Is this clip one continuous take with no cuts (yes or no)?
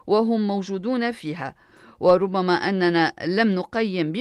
yes